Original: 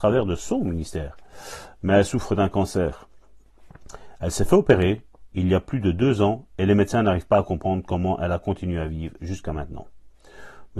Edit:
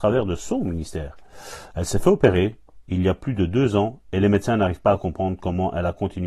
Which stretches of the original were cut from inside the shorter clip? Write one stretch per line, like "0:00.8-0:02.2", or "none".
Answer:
0:01.7-0:04.2